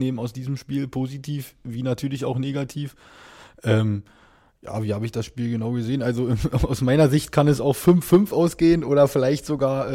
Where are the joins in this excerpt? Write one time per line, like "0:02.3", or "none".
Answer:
none